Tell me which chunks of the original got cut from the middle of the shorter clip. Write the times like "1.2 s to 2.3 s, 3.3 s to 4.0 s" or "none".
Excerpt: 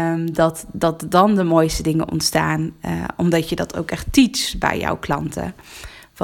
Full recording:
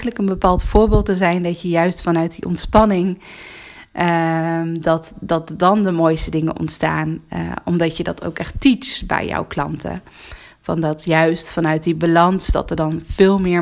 none